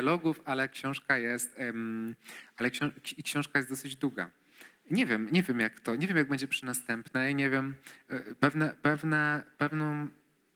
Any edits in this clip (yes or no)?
no